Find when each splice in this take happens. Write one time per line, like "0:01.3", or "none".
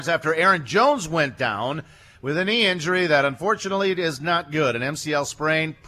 none